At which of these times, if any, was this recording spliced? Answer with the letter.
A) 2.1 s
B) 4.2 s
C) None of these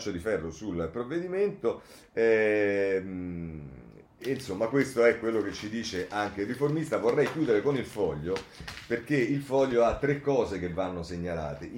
B